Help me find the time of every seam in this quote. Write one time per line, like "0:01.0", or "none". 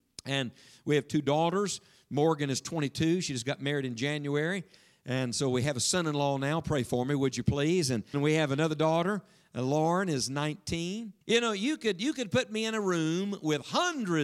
0:08.1
0:11.2